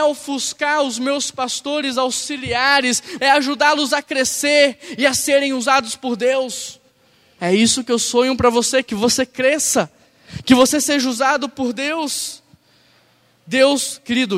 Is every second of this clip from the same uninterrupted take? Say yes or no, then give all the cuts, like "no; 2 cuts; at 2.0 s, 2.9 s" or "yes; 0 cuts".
no; 2 cuts; at 3.2 s, 7.4 s